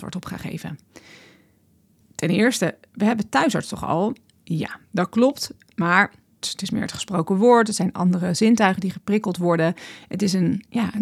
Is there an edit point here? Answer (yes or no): yes